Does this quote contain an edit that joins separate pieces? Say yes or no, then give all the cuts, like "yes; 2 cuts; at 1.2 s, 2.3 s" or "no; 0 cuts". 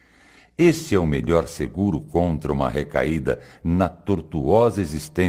no; 0 cuts